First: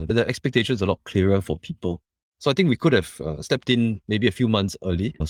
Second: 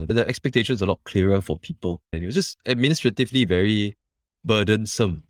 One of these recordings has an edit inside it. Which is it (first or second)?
second